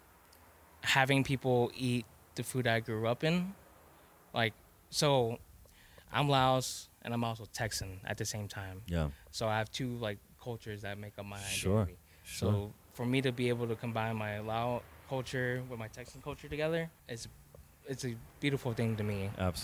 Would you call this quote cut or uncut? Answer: cut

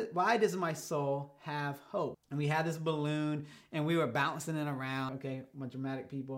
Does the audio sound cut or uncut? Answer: cut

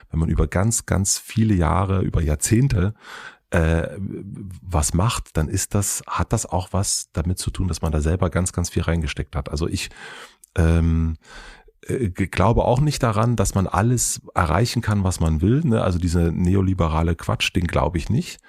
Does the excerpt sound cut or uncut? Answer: uncut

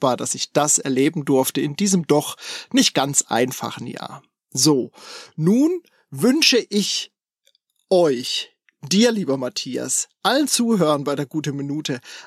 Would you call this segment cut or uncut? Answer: uncut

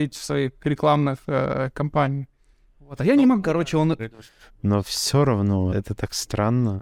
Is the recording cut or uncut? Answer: cut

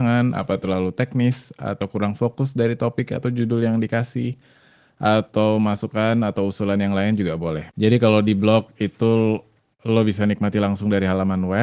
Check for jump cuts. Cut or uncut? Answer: cut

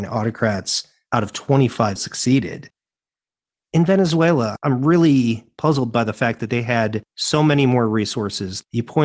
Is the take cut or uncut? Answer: cut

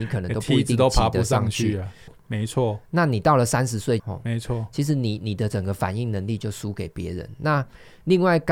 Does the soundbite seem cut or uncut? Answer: cut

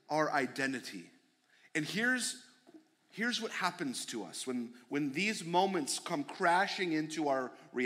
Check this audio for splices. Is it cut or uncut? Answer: uncut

